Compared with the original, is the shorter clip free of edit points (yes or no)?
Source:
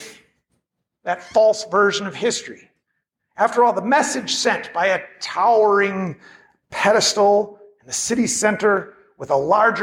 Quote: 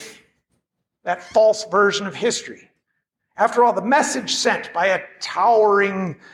yes